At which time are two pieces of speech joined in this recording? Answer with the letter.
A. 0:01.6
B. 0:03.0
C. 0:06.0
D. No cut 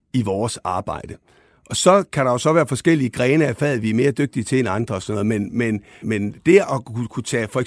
C